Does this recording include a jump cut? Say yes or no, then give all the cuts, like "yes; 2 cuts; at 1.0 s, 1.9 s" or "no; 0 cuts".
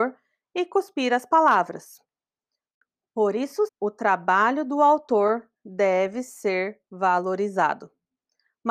yes; 1 cut; at 3.7 s